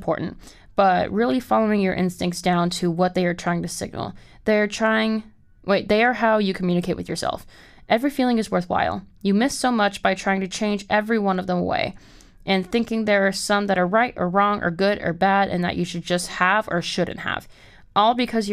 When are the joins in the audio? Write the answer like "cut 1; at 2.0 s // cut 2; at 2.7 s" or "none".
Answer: none